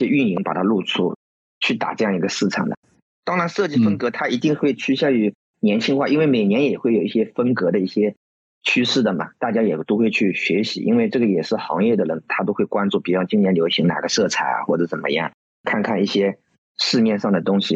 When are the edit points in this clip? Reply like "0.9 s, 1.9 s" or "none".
none